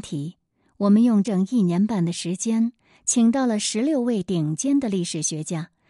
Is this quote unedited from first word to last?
no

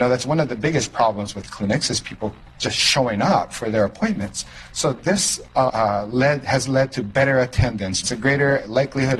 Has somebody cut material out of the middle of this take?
yes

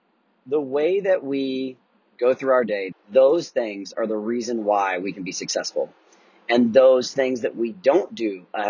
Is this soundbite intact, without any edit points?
no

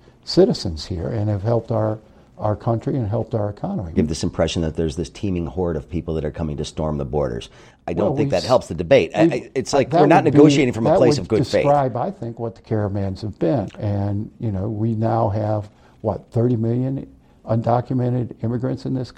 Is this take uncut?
no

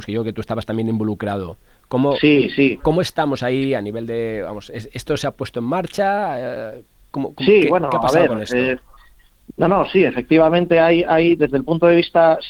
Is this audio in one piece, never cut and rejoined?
yes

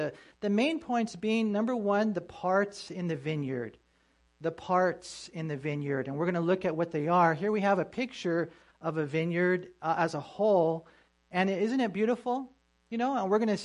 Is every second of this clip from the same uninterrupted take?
yes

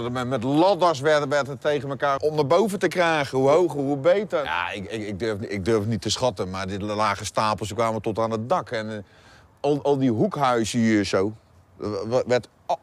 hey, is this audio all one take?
no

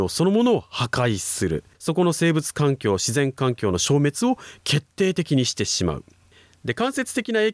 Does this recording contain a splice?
yes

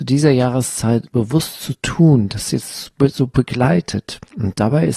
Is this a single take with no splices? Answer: no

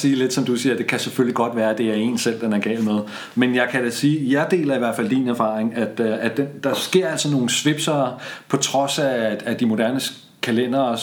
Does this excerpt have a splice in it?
no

